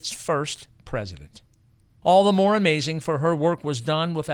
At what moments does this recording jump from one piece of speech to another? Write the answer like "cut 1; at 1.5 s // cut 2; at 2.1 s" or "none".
cut 1; at 2.0 s